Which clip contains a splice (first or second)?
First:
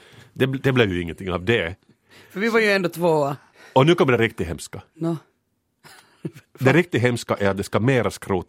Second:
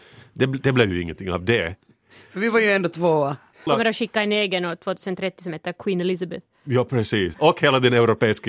second